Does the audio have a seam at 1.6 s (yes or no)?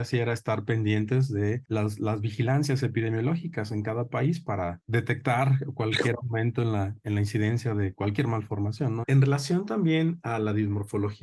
no